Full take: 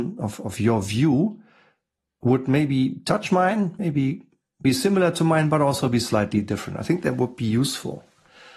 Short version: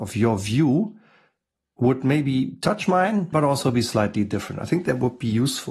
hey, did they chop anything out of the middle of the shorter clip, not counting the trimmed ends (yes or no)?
yes